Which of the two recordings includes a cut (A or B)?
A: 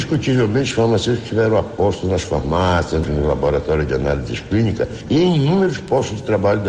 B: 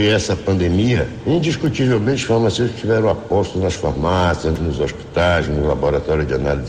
A